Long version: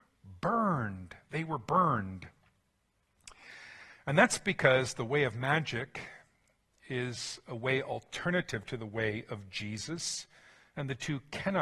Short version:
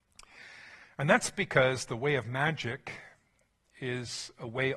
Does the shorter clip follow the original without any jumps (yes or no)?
yes